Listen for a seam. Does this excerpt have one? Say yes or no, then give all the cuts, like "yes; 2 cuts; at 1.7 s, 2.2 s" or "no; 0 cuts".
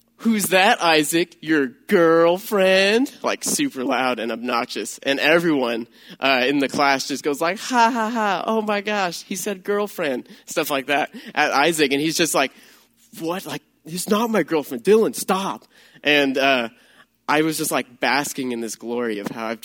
no; 0 cuts